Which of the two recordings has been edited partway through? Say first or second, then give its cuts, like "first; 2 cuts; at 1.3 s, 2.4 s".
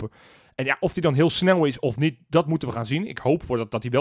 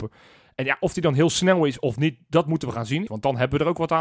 second; 1 cut; at 3.1 s